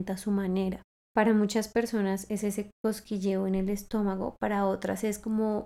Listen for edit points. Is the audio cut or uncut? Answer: uncut